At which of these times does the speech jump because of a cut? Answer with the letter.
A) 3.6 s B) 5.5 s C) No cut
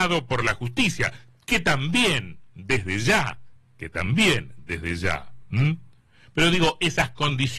C